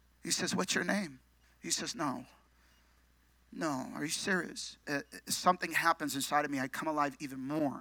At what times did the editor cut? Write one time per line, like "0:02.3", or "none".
0:01.4
0:04.8

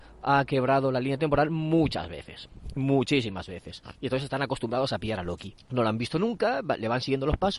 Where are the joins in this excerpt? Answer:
0:05.6

